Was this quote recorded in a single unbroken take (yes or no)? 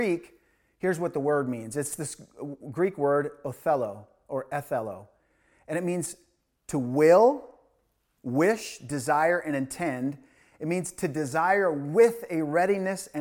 yes